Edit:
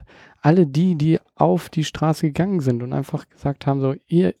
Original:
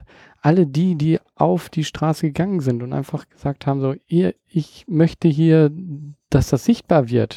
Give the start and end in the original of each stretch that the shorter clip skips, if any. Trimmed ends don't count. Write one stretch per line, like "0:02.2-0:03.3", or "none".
none